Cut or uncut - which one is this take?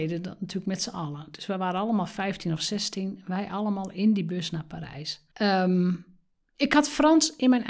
cut